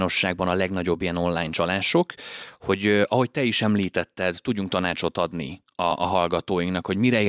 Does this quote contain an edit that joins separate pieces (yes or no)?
no